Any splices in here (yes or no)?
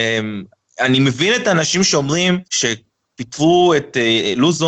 yes